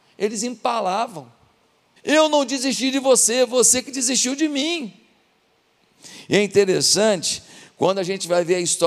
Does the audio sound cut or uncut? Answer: cut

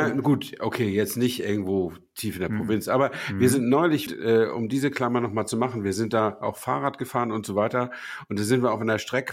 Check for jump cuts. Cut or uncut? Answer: cut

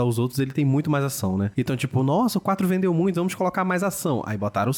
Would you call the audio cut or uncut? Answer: uncut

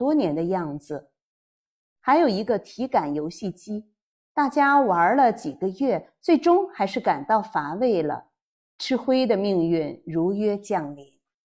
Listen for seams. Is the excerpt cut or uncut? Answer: uncut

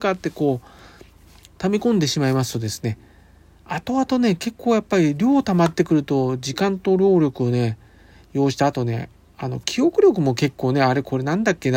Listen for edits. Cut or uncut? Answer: uncut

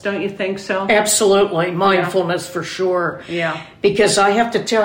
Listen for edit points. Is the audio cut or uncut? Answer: uncut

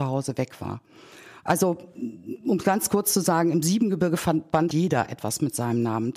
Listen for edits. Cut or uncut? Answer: cut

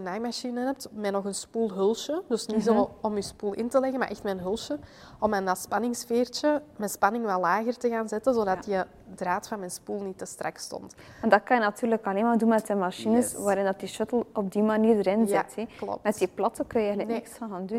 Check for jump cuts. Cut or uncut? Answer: uncut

